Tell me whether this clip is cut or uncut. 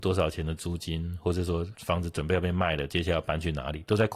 cut